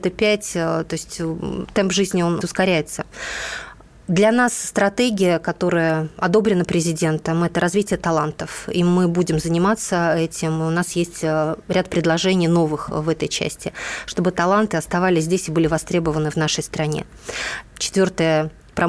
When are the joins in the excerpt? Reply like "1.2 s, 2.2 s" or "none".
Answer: 2.4 s, 17.6 s